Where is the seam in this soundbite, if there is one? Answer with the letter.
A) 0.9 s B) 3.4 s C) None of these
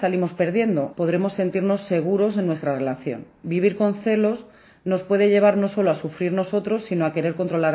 A